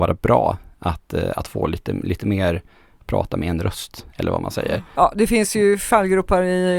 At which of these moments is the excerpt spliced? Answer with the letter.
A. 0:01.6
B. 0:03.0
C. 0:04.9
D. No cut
C